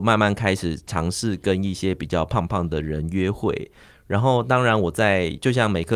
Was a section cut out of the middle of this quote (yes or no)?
no